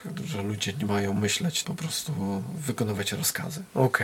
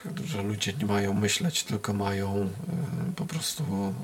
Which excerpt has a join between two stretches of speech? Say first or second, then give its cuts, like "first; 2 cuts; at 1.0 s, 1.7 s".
first; 1 cut; at 1.6 s